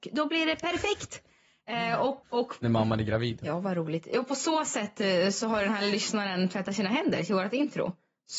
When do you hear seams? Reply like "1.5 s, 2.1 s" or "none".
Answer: 2.2 s, 3.4 s